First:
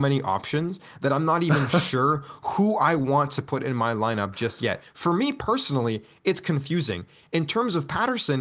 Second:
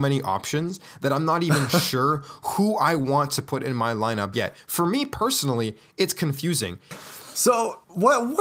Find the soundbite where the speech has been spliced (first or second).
second